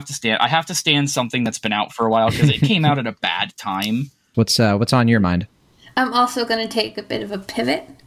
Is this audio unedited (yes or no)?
no